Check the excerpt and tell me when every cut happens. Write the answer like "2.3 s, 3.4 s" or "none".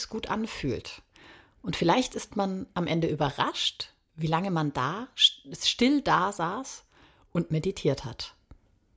none